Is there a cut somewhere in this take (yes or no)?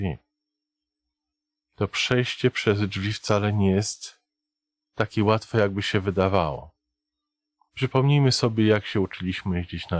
no